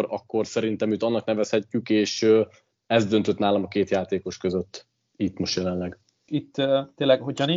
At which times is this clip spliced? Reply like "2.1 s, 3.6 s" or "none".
6.3 s